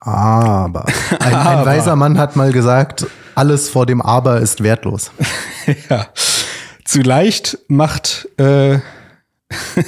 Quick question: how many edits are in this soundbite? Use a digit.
0